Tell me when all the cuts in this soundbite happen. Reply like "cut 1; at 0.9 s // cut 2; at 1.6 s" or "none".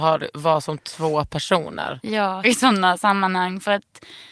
cut 1; at 2.4 s